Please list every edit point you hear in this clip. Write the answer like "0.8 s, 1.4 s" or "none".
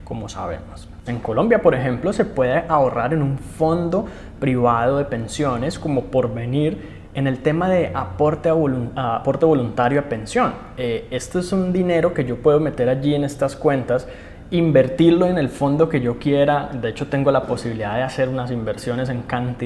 1.1 s